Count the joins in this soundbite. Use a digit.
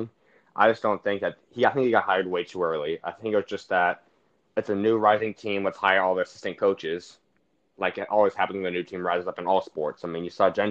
0